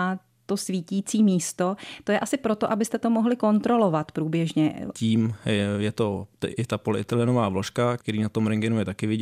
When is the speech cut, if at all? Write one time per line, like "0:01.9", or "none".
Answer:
0:04.9
0:08.0